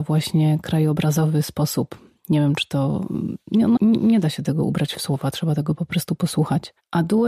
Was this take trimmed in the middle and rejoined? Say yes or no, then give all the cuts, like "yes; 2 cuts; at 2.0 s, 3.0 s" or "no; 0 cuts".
yes; 1 cut; at 3.8 s